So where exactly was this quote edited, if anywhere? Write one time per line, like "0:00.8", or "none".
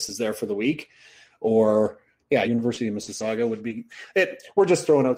0:02.4